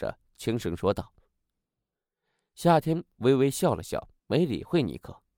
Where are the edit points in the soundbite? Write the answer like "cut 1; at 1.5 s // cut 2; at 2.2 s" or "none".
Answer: cut 1; at 4.2 s